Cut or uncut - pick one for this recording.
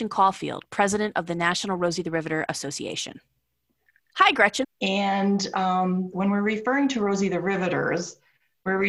cut